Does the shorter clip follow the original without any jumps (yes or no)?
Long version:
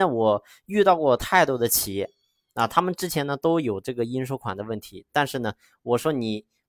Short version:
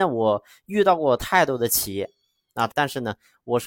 no